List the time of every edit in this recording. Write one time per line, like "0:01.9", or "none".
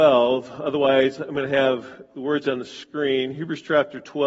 none

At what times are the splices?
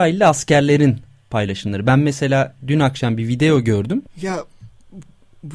0:04.1

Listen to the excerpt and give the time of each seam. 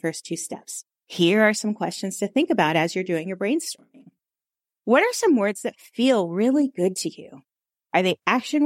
0:00.9

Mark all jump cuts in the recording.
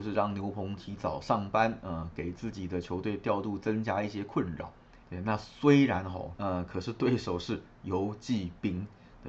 0:05.0
0:06.4

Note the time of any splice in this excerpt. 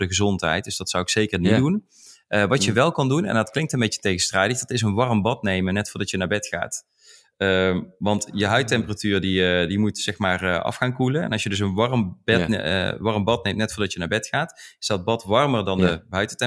none

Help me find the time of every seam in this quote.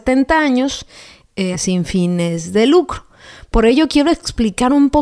0:01.5

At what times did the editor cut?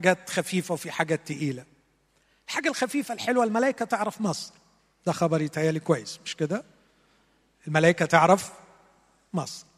none

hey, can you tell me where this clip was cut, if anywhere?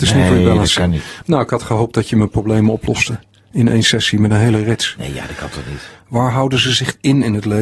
0:01.2
0:05.9

